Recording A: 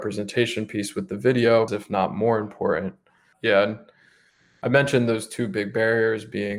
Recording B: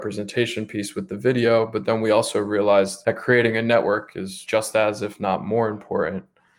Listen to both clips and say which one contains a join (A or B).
A